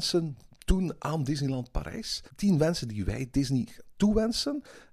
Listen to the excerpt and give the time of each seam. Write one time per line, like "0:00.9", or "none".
0:02.3